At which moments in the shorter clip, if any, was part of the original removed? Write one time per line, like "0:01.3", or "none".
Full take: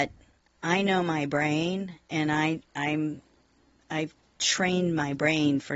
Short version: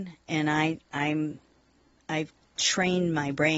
none